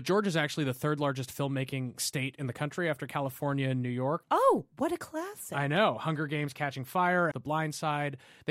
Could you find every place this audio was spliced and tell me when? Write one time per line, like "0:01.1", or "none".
0:04.2
0:07.3